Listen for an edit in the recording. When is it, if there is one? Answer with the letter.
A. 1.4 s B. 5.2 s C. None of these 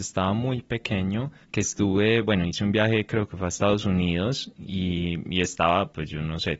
A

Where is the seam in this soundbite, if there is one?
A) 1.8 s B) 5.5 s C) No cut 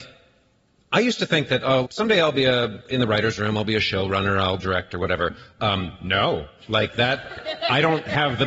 A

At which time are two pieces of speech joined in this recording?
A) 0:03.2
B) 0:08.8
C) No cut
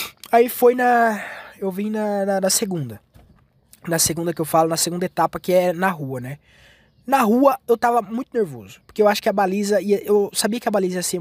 C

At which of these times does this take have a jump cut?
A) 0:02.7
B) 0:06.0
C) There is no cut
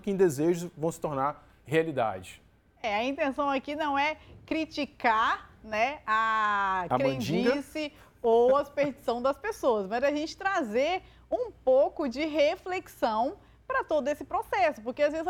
A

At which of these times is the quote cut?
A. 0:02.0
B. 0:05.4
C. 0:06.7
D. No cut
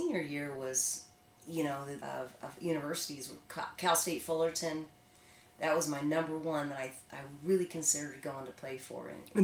A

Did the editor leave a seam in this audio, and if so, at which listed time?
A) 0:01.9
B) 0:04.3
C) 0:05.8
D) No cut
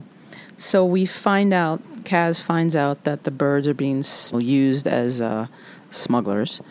B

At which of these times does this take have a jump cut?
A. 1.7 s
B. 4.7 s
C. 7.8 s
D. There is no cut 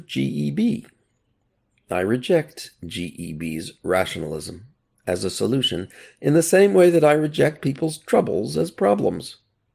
D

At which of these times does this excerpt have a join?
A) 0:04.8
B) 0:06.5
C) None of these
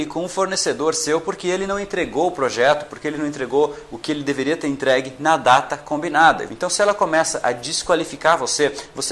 B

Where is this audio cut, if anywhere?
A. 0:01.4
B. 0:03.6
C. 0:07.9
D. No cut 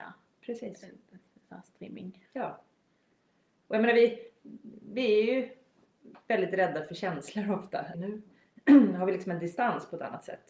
C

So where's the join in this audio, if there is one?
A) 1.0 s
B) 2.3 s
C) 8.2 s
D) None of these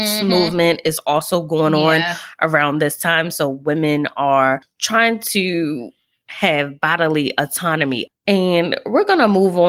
D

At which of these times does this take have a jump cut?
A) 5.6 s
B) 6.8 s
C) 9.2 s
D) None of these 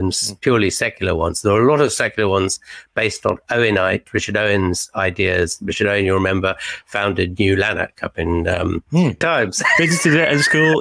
C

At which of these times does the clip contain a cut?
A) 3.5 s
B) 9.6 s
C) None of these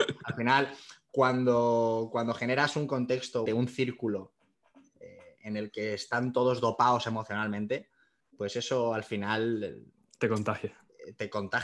A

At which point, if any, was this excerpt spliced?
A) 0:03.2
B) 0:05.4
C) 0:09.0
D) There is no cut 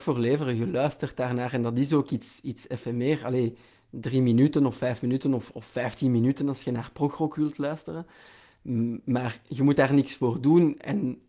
D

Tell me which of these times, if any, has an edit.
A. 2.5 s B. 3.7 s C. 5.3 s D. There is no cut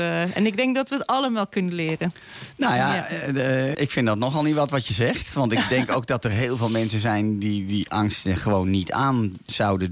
B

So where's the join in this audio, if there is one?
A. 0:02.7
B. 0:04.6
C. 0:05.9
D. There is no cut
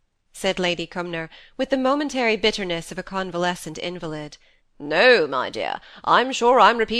B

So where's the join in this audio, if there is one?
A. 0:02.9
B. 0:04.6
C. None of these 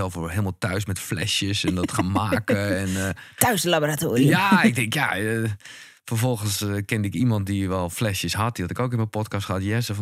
C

